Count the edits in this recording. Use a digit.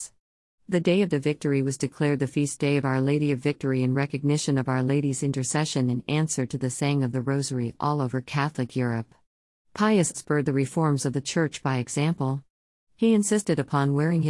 1